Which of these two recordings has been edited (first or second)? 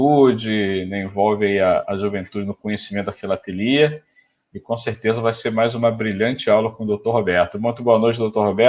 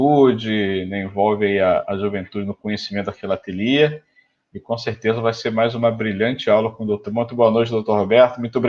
second